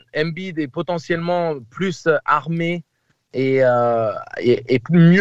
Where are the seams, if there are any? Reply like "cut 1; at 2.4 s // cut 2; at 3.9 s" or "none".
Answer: none

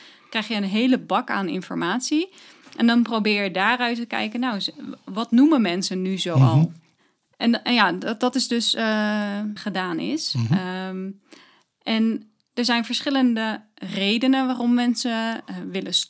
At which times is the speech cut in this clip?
cut 1; at 9.6 s

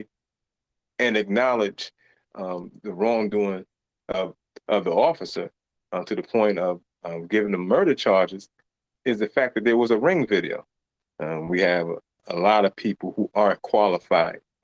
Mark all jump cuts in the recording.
cut 1; at 11.0 s // cut 2; at 12.2 s

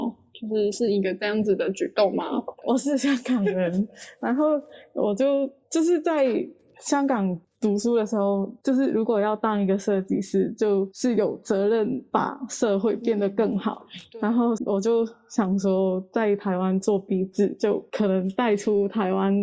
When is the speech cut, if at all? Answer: cut 1; at 2.6 s // cut 2; at 8.6 s // cut 3; at 14.6 s

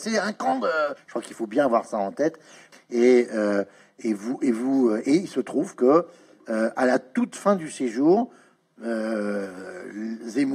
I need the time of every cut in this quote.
cut 1; at 1.0 s // cut 2; at 2.7 s

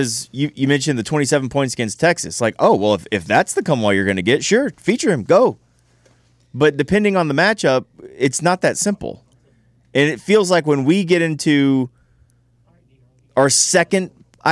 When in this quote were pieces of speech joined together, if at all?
none

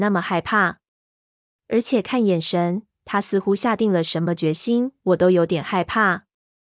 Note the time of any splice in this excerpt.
cut 1; at 5.0 s

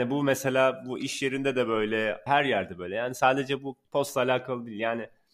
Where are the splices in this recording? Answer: cut 1; at 2.3 s // cut 2; at 3.8 s

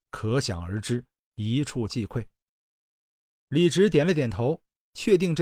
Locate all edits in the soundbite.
cut 1; at 1.3 s

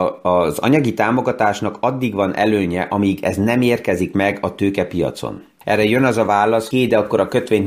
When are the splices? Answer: cut 1; at 5.6 s // cut 2; at 6.7 s

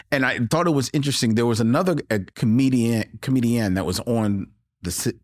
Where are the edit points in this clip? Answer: cut 1; at 2.3 s

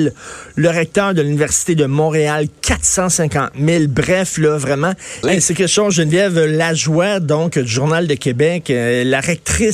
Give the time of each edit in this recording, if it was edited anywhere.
cut 1; at 5.2 s

